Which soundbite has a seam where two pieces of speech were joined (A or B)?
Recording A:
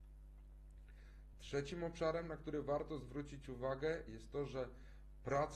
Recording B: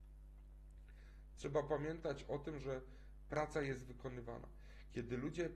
B